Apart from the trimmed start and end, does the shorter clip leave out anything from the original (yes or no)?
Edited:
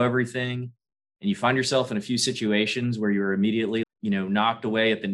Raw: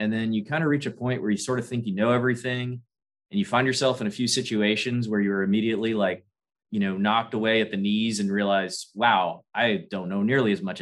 yes